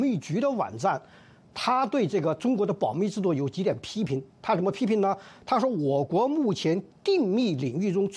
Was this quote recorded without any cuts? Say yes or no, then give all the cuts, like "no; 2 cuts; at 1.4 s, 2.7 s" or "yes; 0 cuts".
yes; 0 cuts